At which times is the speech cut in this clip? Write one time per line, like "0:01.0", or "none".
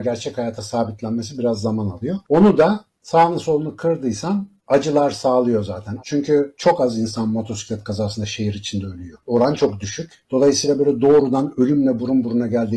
0:06.0